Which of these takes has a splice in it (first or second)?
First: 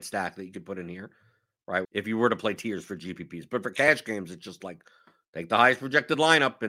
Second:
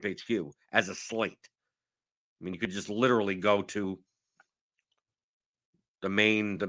first